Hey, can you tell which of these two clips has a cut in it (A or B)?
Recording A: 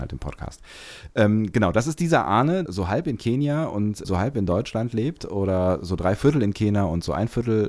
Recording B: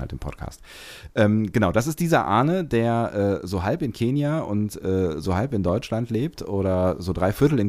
A